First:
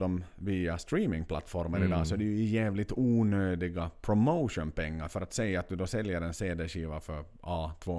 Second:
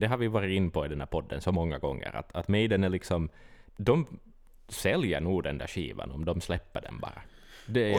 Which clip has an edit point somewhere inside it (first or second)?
second